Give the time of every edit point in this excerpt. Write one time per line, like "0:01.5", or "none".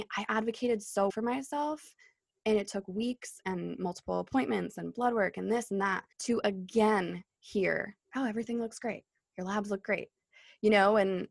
0:01.1
0:06.1
0:08.0

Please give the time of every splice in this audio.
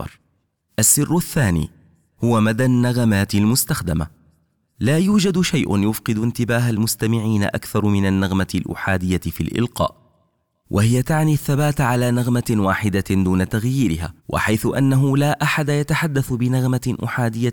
0:14.2

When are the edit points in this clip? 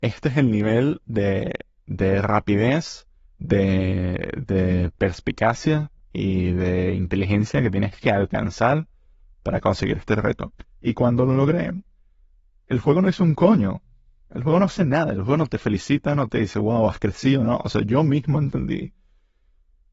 none

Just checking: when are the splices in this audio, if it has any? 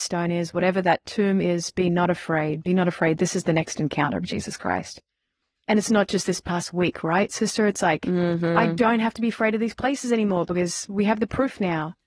none

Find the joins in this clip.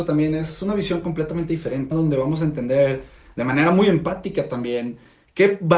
0:01.9

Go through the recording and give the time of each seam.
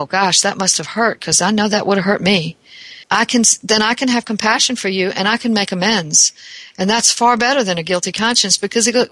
0:03.0

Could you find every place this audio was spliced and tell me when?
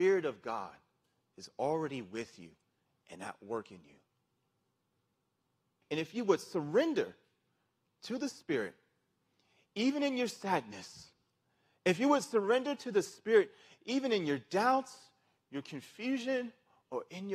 0:05.8

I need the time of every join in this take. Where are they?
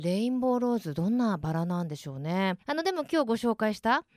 0:02.6

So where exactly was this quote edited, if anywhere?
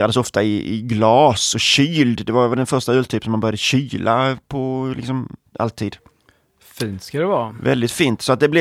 0:05.4

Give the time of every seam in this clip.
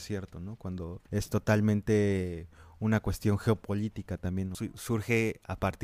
0:01.1
0:04.5

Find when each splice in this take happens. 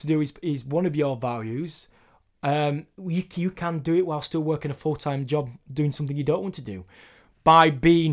0:03.0

